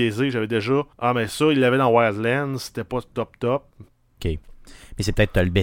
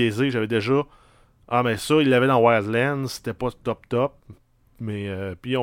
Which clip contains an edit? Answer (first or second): first